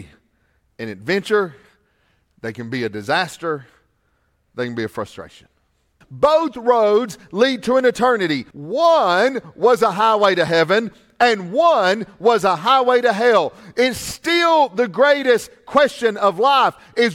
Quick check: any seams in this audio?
yes; 2 cuts; at 6.0 s, 8.5 s

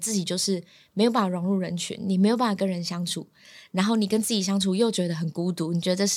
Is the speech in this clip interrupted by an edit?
no; 0 cuts

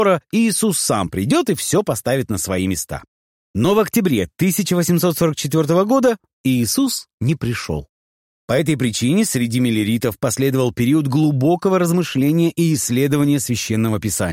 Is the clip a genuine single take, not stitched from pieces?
yes; 0 cuts

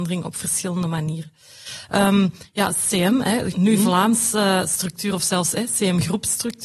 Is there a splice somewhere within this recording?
yes; 1 cut; at 3.5 s

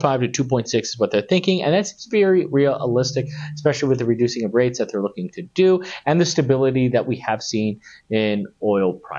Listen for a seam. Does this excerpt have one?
no; 0 cuts

